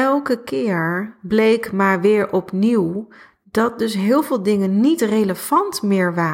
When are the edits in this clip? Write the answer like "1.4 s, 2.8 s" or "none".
none